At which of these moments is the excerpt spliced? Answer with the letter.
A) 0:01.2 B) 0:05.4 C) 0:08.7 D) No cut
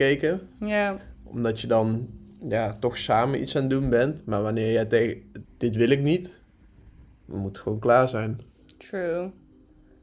B